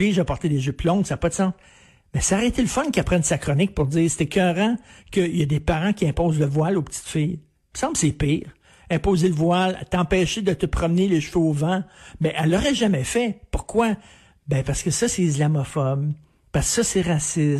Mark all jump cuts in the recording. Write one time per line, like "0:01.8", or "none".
none